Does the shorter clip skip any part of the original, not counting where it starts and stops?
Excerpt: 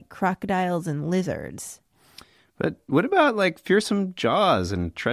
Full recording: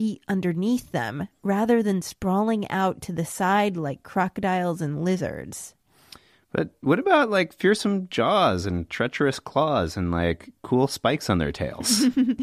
no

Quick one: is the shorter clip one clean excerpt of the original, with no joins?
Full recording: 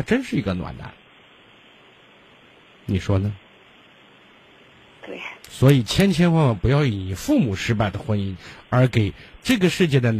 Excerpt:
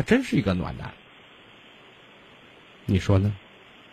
yes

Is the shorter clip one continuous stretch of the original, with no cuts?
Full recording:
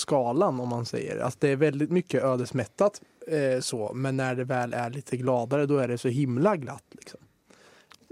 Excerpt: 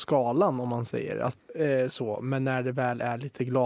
no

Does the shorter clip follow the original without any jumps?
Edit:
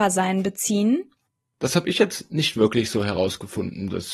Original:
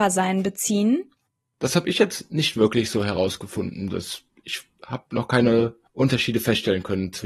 yes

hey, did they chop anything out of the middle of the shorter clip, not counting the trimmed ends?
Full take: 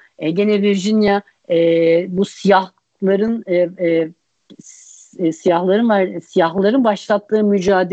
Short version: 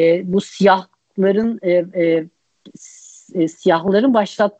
yes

